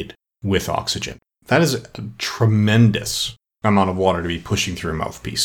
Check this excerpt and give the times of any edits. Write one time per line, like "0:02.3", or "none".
none